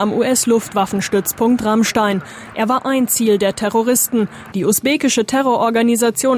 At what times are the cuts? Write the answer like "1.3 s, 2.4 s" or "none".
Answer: 4.5 s